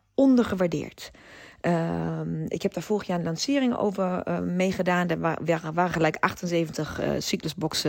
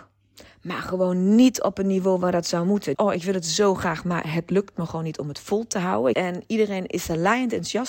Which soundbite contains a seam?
second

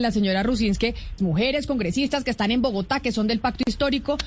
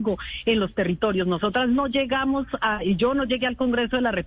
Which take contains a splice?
first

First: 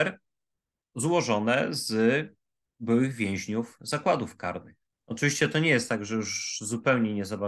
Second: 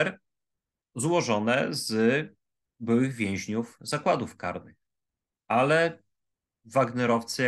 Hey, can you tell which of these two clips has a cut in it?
first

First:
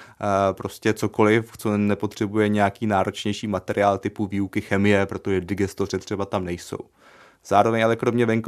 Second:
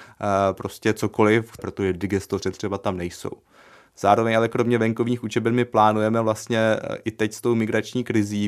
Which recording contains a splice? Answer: second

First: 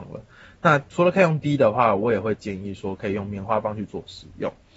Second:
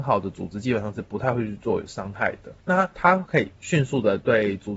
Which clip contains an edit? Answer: second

